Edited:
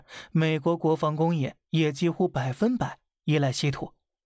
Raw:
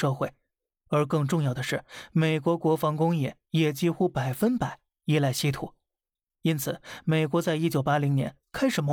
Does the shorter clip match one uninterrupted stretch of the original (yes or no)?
yes